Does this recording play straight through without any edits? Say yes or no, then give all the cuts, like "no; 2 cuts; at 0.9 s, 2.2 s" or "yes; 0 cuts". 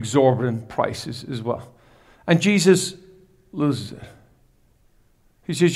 yes; 0 cuts